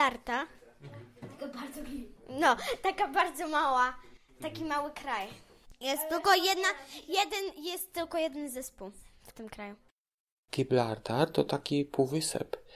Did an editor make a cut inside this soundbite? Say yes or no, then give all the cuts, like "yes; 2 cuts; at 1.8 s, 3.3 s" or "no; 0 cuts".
no; 0 cuts